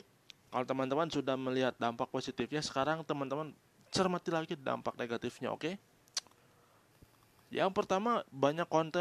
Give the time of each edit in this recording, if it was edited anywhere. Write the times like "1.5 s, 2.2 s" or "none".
none

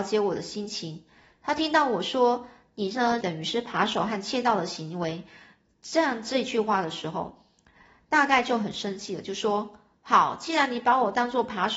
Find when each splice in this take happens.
3.2 s

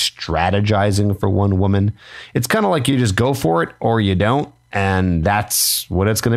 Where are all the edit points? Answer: none

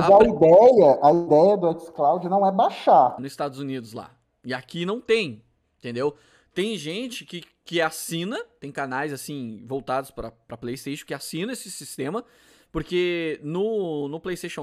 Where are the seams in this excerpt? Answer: 3.2 s

